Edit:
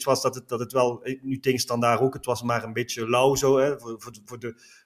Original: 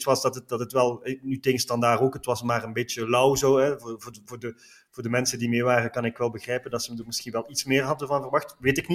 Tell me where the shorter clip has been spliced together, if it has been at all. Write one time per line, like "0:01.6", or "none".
none